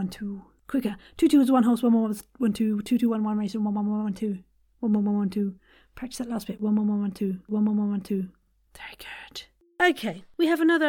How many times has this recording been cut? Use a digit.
1